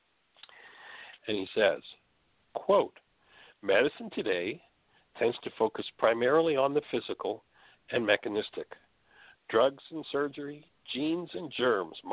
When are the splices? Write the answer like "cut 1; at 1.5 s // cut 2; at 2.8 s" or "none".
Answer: cut 1; at 1.2 s